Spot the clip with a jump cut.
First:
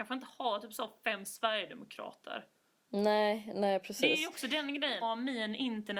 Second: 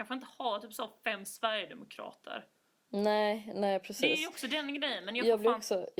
first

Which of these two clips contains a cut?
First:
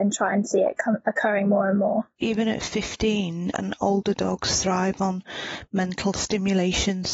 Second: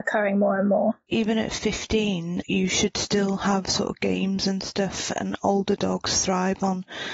first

